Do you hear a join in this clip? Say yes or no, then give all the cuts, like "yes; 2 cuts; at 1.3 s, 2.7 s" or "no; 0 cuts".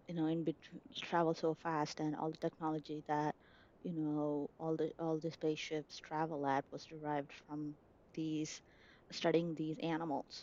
no; 0 cuts